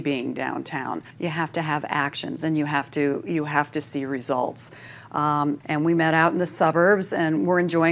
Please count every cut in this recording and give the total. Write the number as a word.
two